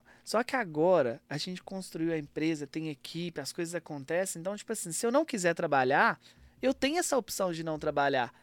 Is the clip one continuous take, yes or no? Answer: yes